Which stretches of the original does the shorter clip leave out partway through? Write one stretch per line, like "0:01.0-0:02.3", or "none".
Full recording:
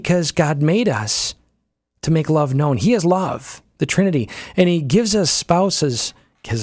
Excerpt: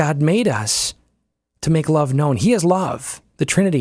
none